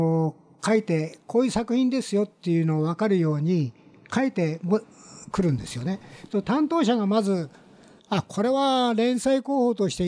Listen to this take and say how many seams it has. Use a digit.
0